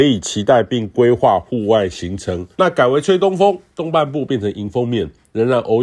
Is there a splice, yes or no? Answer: yes